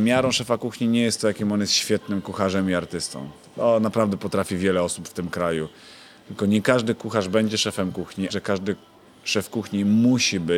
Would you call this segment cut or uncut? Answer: cut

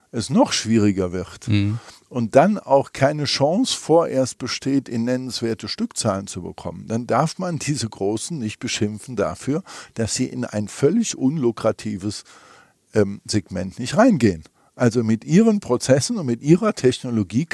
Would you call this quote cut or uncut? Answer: uncut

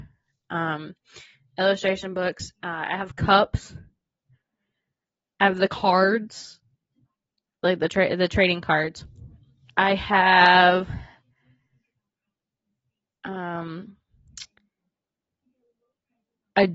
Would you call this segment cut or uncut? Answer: uncut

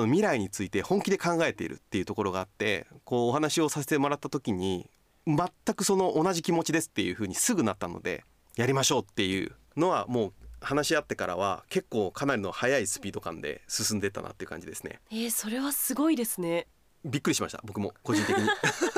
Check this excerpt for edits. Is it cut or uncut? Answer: uncut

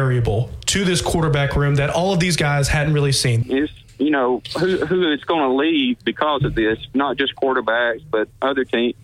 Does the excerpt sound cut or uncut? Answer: cut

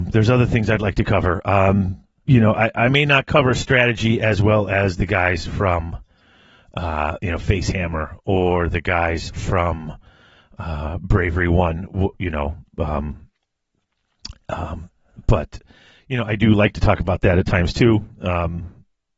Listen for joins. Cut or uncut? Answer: uncut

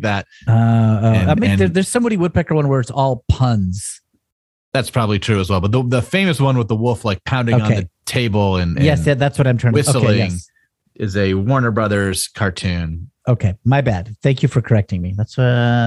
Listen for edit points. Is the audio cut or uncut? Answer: uncut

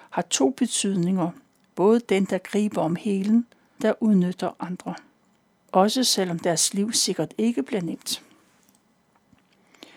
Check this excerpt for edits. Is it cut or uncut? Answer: cut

